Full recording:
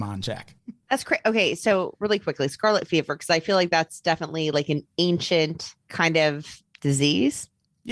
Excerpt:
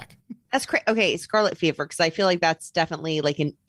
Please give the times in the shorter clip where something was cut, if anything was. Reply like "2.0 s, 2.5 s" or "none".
1.2 s